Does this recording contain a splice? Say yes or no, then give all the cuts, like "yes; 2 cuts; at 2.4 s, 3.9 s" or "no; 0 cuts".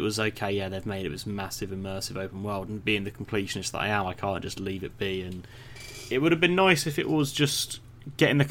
no; 0 cuts